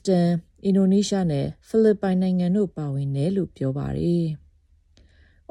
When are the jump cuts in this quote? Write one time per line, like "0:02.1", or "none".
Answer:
none